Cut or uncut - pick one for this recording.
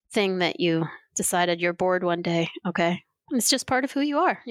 cut